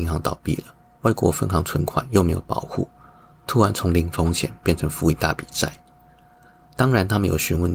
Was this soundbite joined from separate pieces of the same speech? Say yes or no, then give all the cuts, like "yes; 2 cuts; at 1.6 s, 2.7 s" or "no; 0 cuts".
yes; 1 cut; at 6.7 s